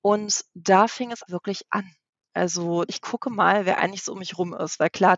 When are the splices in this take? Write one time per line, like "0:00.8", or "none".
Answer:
0:01.3
0:02.9